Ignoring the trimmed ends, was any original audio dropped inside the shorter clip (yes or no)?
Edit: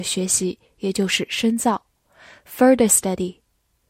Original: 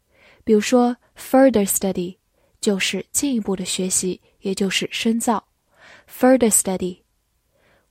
no